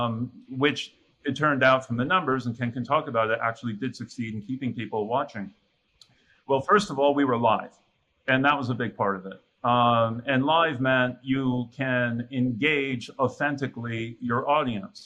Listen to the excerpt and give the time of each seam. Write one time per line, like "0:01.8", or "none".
0:09.5